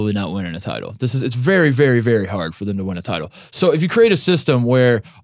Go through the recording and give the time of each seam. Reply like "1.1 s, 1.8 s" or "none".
none